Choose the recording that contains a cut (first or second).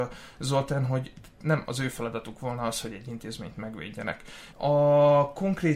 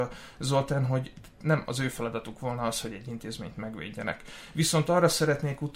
first